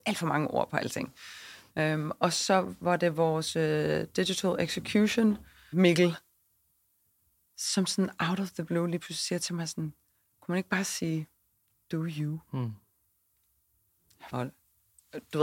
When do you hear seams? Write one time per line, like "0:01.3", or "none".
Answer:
0:05.7
0:14.3